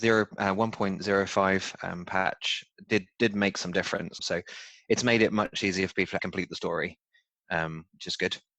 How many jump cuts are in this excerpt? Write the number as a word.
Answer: two